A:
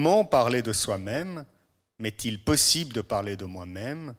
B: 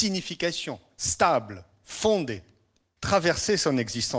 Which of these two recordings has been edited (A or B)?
B